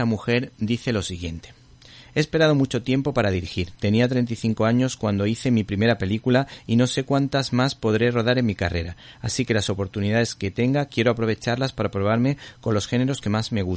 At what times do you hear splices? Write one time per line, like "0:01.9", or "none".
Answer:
none